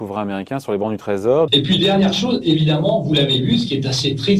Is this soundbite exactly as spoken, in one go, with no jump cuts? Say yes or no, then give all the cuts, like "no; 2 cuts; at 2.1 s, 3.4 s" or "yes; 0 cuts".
no; 1 cut; at 1.5 s